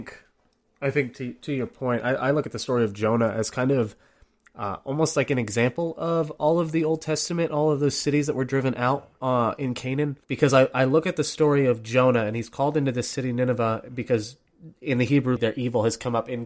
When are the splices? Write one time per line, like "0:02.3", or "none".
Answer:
0:10.2
0:15.4